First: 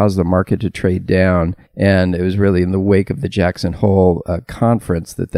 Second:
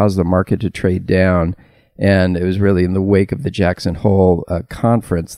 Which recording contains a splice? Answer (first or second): first